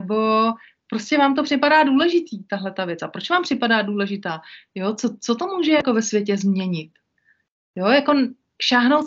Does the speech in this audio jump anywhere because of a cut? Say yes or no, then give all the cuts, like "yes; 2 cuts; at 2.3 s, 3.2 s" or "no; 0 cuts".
no; 0 cuts